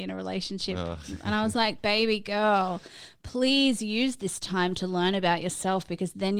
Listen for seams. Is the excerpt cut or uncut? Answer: uncut